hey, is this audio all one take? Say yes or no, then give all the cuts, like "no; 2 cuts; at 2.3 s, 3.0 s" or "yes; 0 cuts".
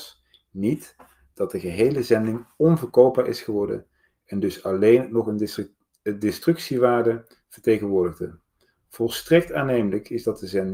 yes; 0 cuts